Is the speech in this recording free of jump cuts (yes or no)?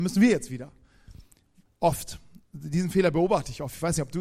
no